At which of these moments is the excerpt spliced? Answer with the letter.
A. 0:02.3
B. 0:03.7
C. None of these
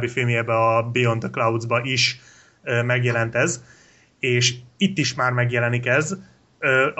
C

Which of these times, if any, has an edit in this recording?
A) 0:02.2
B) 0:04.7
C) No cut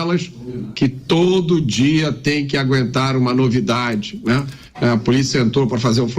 B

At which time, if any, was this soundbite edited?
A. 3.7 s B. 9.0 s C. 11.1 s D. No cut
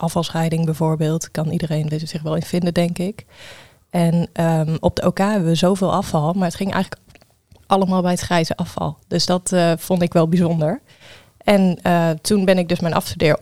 D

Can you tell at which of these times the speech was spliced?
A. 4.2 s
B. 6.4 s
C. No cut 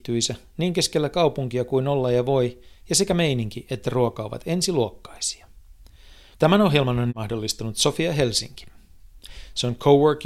B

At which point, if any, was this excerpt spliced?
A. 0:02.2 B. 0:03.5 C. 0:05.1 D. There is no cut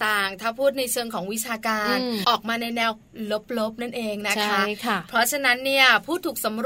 A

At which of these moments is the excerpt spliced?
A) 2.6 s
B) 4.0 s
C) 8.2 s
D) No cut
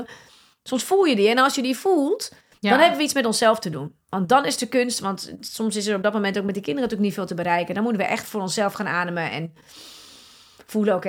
C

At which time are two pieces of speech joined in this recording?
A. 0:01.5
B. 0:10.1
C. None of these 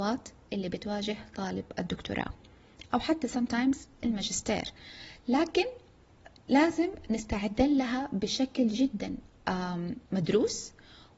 B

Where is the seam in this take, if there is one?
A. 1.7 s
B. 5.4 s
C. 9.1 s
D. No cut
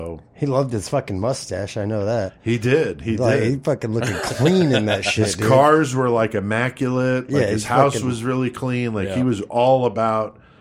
D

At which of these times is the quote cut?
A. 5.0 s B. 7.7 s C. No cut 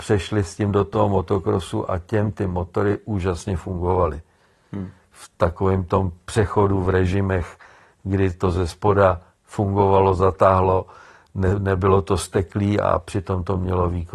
C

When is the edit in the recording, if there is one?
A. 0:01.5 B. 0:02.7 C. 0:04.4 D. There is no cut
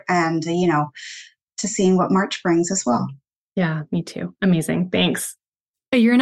A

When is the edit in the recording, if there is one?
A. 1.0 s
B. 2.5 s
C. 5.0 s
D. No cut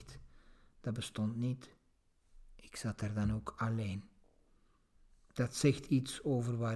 D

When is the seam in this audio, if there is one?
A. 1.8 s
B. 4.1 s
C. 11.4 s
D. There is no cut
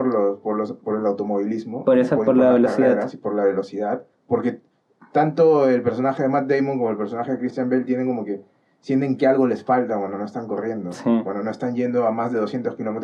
B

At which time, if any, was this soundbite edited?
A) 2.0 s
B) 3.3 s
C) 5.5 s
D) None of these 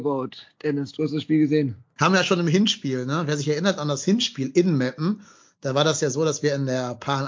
A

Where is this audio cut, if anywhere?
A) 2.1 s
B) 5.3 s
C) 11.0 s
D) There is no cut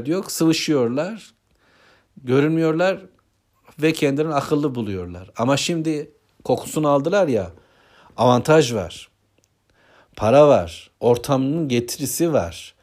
C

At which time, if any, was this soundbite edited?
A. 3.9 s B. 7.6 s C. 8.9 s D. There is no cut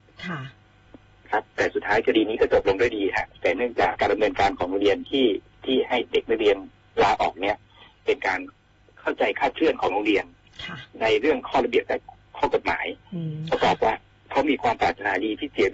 A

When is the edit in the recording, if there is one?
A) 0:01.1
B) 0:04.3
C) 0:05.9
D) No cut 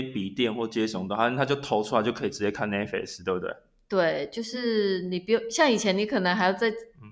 D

